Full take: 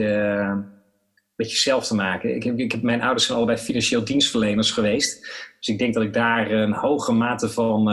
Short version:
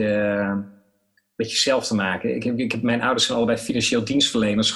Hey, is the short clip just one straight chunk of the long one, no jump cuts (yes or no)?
yes